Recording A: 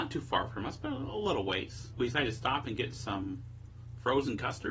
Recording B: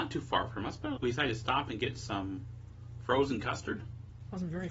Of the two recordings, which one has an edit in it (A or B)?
B